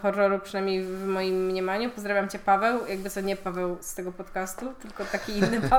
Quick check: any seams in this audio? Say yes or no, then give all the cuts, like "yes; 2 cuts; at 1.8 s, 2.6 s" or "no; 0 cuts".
no; 0 cuts